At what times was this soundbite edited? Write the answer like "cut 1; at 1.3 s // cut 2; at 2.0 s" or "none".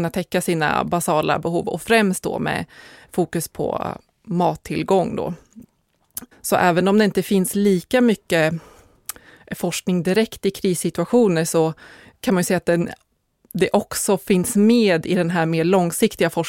cut 1; at 6.3 s